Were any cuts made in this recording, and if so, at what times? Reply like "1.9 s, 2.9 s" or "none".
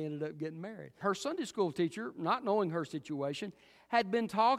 1.0 s